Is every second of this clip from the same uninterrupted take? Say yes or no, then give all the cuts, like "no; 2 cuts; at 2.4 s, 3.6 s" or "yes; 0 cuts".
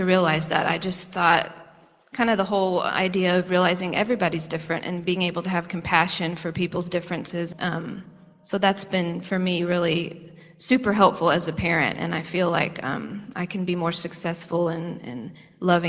no; 1 cut; at 7.5 s